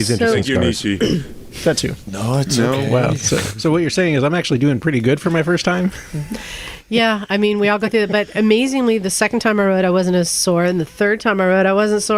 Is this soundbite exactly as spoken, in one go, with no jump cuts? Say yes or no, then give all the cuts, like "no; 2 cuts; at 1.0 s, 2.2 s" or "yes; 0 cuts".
no; 1 cut; at 2.1 s